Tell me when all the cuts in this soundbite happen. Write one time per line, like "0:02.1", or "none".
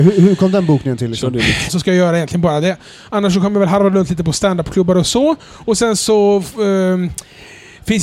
0:01.7